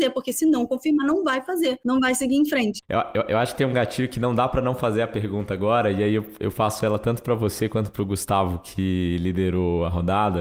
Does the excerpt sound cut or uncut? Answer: cut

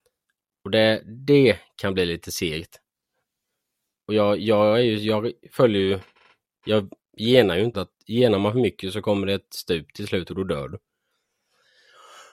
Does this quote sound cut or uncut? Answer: cut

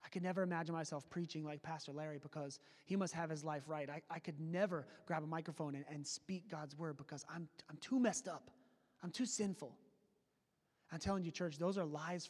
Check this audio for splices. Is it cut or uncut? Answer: uncut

